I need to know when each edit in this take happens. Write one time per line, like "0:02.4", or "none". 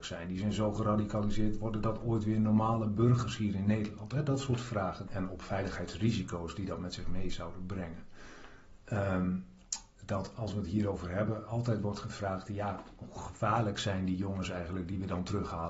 0:05.1